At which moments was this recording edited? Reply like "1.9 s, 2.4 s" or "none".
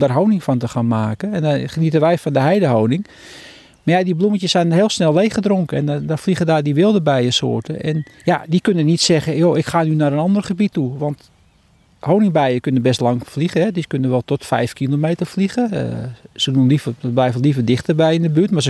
8.1 s